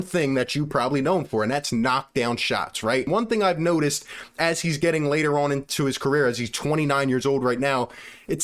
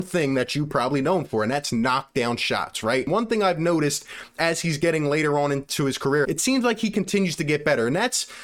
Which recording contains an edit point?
second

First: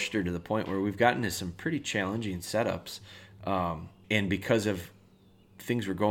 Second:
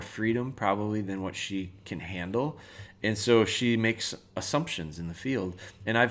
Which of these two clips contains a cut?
first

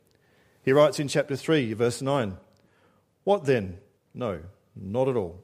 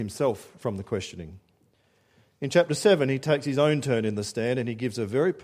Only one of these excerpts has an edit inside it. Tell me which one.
first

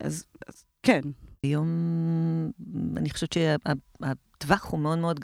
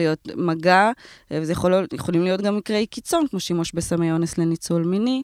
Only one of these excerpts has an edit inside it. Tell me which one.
first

